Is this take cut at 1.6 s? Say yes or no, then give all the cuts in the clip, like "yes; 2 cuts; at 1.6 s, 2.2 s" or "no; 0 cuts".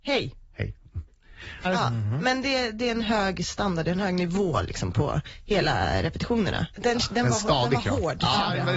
yes; 2 cuts; at 1.6 s, 6.7 s